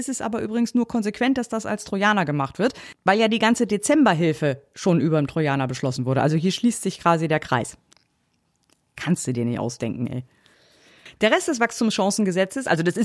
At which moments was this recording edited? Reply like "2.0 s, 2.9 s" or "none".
none